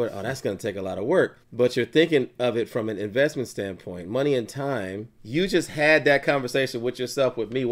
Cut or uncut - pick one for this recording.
cut